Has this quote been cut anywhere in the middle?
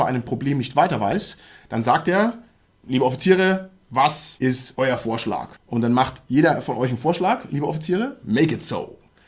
yes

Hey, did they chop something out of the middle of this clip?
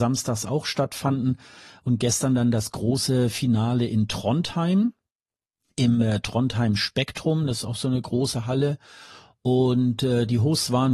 no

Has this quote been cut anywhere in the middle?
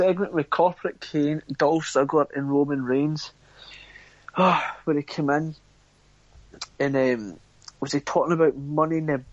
no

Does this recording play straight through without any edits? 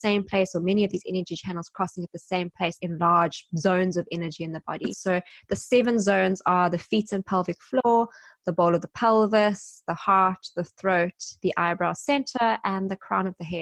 no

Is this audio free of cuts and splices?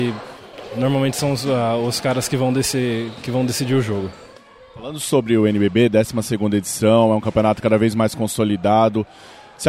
yes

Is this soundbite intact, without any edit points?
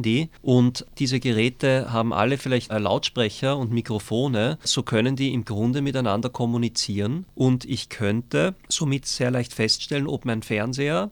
no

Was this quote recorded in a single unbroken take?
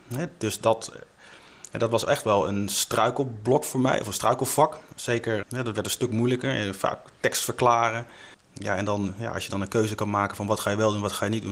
no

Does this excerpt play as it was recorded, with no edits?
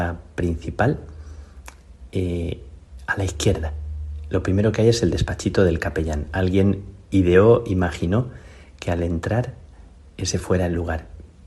yes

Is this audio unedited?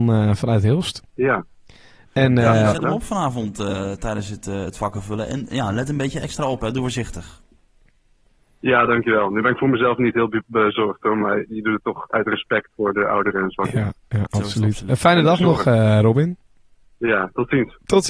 yes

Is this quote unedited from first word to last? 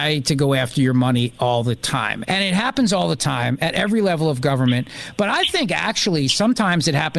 no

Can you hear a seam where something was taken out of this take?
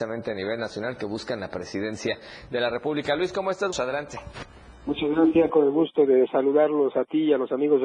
yes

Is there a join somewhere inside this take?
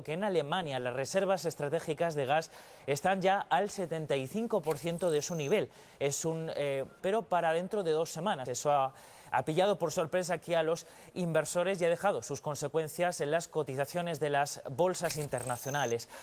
yes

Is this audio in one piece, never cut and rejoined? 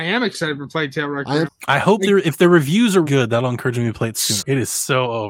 no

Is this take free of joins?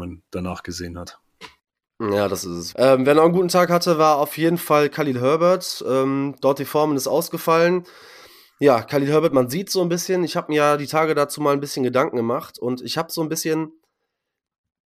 no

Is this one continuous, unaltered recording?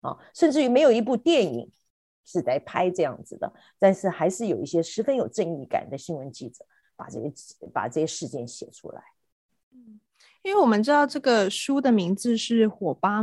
yes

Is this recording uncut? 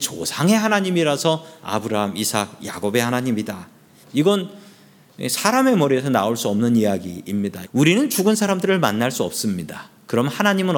no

